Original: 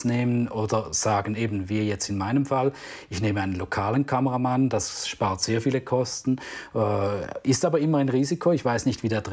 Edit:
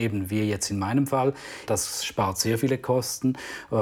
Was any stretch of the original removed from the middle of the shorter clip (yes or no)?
yes